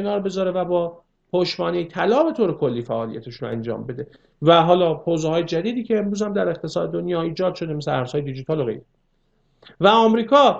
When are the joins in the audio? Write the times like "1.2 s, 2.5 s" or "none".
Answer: none